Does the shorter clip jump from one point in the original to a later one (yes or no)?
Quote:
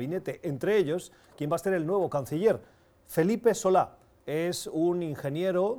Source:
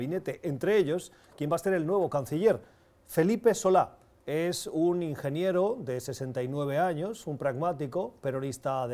no